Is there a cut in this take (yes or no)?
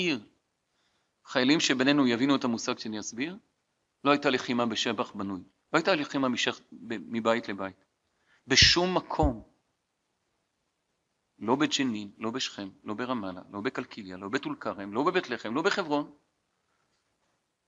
no